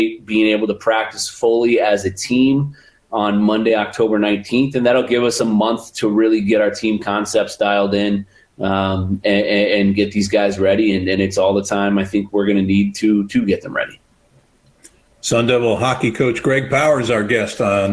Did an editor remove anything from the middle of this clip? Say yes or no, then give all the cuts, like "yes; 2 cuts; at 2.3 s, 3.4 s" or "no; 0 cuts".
no; 0 cuts